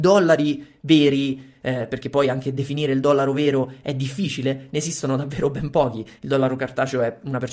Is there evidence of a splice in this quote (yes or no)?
no